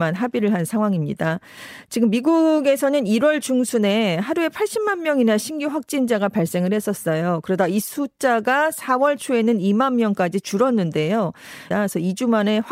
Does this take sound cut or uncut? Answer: cut